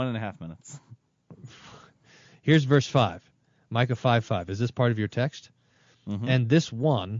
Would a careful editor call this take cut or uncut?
uncut